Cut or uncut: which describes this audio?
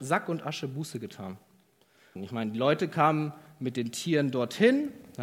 cut